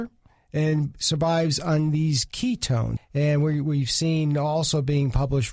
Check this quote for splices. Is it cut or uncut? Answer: cut